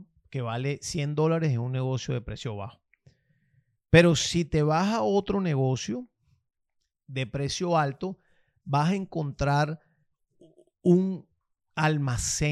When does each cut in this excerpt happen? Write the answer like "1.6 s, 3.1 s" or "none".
none